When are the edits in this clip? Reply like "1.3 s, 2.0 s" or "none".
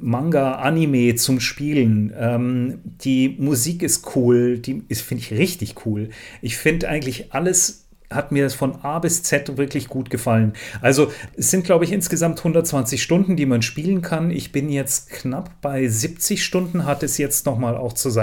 none